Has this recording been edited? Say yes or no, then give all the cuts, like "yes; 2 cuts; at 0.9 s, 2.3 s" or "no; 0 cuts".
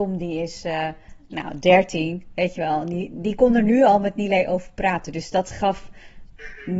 no; 0 cuts